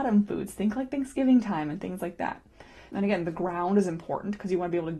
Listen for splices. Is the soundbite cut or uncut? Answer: cut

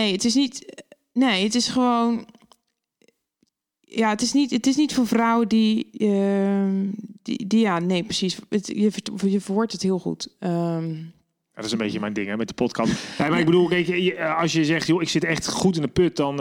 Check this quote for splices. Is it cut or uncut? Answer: cut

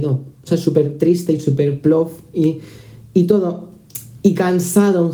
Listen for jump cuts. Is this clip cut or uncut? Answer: uncut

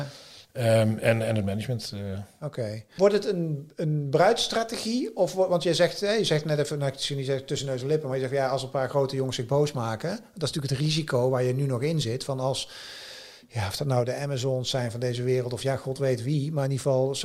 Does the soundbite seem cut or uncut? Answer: uncut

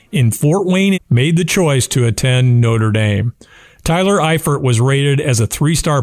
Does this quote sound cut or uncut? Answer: cut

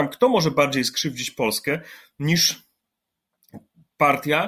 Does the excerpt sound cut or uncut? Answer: uncut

